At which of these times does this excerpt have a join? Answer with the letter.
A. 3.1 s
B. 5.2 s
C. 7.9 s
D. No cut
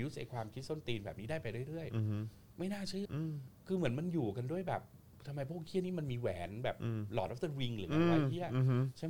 A